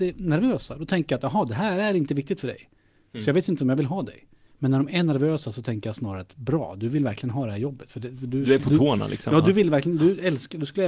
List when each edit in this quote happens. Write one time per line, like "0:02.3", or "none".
none

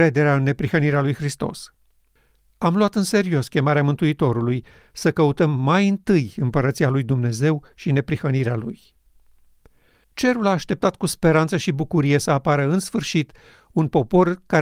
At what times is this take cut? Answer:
0:10.0

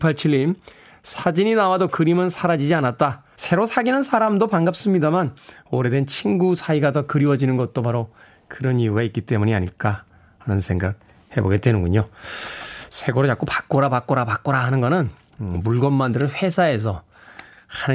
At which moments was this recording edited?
0:03.4

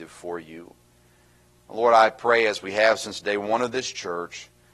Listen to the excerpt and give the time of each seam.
none

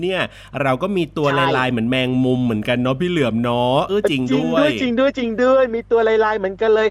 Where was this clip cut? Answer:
0:03.9

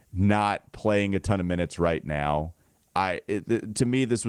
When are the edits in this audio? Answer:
none

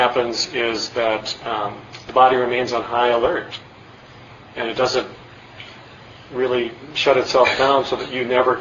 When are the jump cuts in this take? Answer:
none

